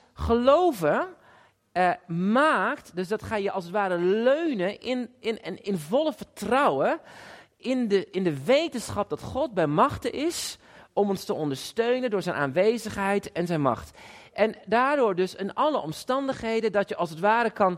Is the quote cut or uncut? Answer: uncut